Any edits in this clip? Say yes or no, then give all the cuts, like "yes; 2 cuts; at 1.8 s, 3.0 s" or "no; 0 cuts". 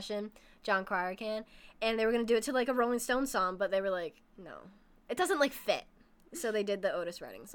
no; 0 cuts